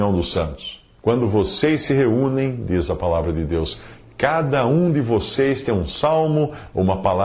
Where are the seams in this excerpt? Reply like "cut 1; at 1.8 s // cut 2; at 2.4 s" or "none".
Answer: cut 1; at 1.0 s